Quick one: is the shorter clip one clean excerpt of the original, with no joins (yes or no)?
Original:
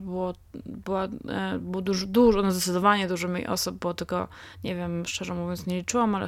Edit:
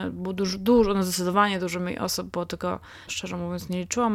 no